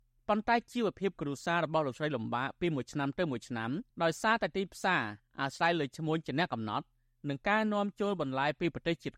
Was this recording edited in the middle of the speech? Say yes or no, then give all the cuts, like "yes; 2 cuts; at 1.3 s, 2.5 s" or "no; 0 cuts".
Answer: yes; 1 cut; at 3.9 s